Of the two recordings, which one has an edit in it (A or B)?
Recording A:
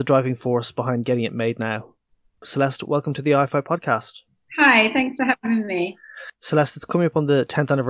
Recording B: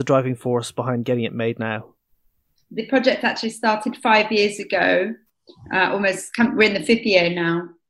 A